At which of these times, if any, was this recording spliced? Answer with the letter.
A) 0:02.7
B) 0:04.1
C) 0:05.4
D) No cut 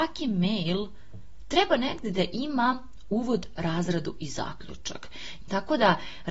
C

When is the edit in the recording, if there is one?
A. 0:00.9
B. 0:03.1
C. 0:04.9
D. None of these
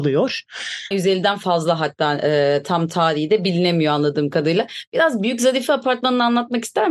A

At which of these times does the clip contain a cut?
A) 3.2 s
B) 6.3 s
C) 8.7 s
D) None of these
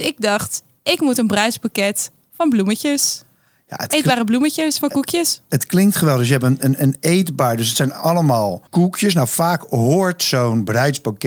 C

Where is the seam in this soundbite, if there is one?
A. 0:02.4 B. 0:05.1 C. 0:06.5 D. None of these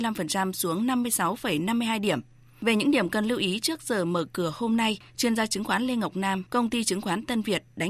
C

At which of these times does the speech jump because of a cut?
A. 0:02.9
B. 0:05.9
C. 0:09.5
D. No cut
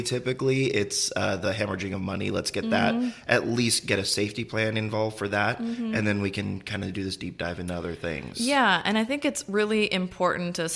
D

